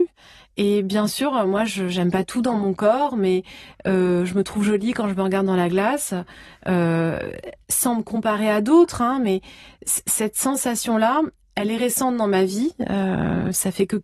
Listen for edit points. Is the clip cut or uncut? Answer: uncut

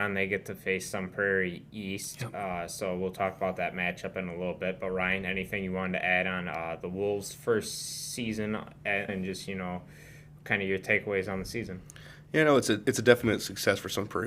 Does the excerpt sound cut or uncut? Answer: cut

